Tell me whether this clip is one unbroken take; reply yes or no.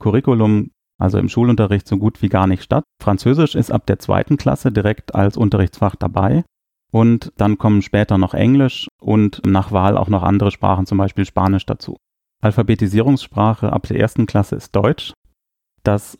no